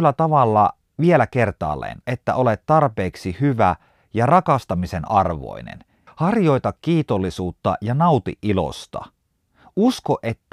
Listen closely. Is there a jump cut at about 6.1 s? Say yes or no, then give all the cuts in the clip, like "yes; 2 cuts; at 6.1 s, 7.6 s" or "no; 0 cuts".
yes; 2 cuts; at 2.0 s, 6.1 s